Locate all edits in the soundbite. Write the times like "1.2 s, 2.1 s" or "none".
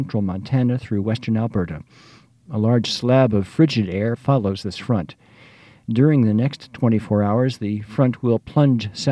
4.2 s

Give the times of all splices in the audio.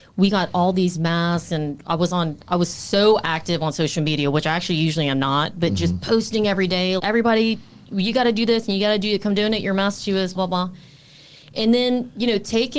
7.0 s, 10.3 s

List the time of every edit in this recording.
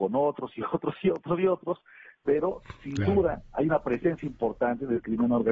none

